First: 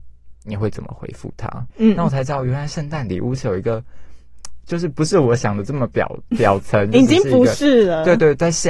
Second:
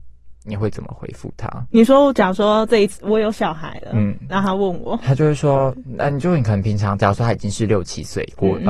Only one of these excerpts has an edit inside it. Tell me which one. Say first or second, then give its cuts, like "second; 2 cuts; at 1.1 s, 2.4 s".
first; 1 cut; at 1.7 s